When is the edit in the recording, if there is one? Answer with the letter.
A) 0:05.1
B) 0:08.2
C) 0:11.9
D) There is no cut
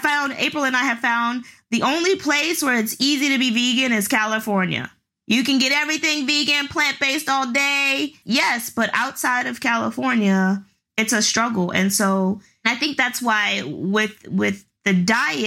B